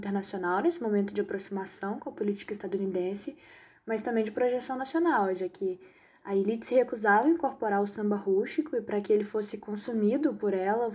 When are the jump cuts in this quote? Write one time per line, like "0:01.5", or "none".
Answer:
none